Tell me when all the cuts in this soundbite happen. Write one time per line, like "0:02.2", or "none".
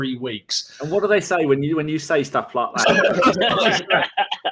0:02.8

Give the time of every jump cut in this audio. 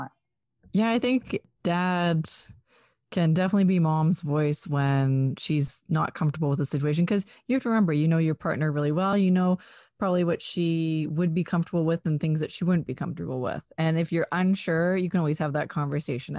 none

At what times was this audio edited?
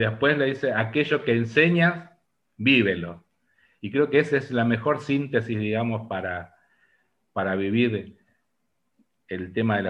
none

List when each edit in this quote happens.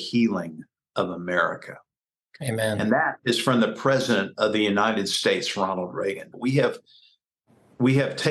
0:06.3

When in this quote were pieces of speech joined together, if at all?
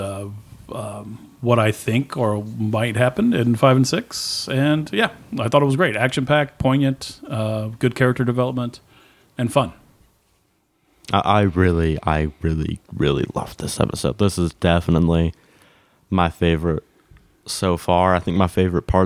none

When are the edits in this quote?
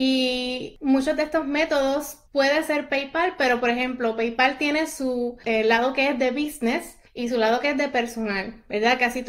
0:02.3
0:07.1

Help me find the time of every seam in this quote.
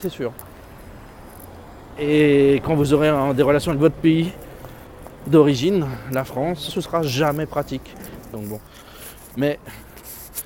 0:02.0
0:06.7
0:08.3

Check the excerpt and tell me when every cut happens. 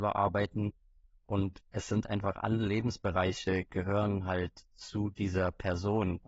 none

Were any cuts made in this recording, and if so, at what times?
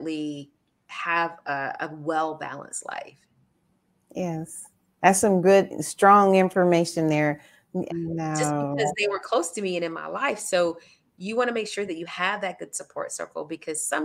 0:07.9

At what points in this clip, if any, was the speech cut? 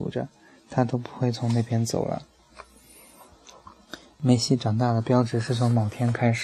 none

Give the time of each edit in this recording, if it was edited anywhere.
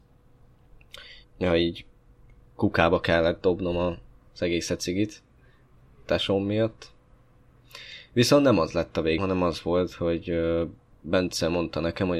0:01.2
0:09.2

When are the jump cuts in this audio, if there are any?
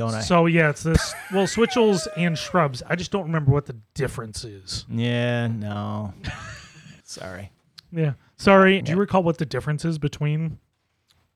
0:07.0
0:08.8

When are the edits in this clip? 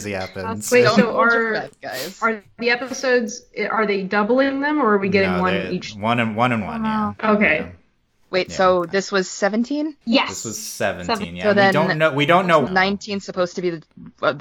0:10.0
0:12.7

